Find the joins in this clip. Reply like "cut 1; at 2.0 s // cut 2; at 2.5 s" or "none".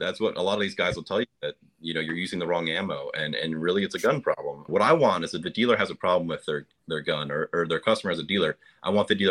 cut 1; at 4.7 s